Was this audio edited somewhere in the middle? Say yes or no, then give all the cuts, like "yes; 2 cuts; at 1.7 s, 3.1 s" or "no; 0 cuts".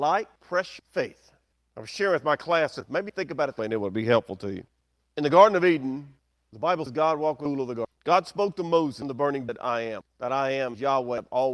no; 0 cuts